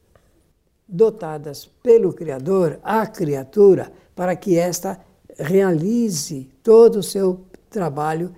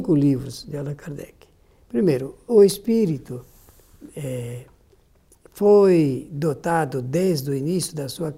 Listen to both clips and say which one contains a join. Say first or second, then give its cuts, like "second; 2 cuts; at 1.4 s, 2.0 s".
second; 1 cut; at 2.5 s